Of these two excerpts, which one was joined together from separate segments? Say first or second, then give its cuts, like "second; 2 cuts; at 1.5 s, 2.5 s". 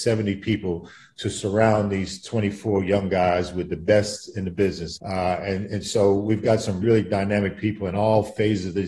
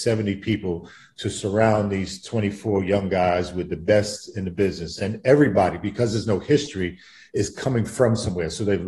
first; 2 cuts; at 5.0 s, 6.8 s